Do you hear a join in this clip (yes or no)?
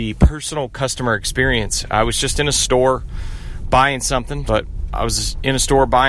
yes